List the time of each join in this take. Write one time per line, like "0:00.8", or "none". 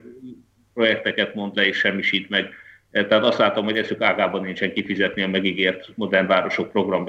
none